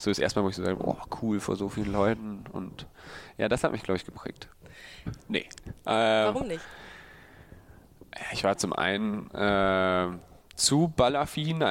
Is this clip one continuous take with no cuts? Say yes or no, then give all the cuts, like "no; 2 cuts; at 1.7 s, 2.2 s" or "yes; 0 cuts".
no; 1 cut; at 5.1 s